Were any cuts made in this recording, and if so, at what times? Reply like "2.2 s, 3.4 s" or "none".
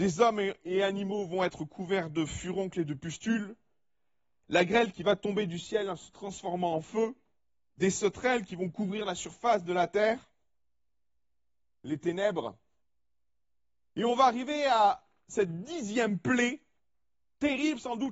none